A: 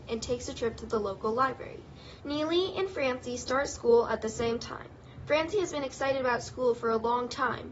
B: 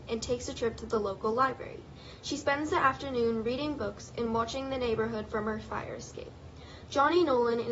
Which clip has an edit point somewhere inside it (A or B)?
A